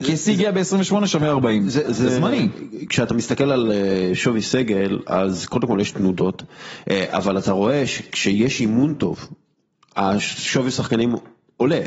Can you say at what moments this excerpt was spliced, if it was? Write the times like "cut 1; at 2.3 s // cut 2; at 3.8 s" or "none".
cut 1; at 1.8 s